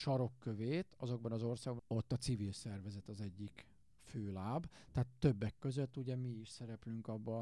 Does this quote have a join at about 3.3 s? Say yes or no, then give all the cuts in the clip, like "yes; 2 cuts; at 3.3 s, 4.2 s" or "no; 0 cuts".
no; 2 cuts; at 1.8 s, 4.9 s